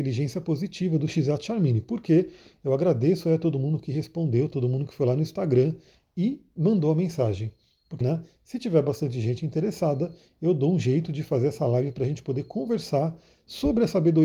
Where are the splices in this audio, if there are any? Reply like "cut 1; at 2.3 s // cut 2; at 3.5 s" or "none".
cut 1; at 8.0 s